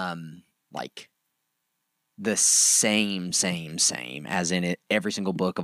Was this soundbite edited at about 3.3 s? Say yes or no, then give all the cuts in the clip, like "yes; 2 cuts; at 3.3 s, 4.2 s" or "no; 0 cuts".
no; 0 cuts